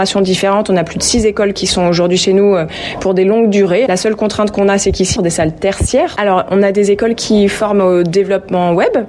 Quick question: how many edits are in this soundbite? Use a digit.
3